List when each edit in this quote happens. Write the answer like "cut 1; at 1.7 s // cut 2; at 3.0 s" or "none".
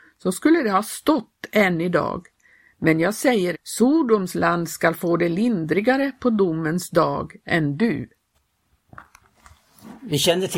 cut 1; at 3.5 s